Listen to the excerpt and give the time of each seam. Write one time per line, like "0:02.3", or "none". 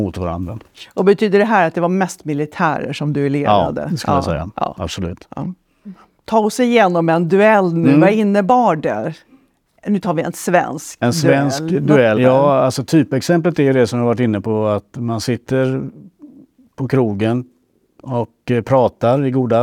0:12.2